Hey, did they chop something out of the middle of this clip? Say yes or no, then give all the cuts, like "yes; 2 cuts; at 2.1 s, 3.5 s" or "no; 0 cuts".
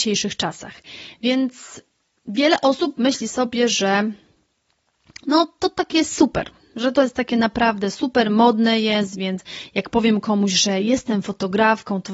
no; 0 cuts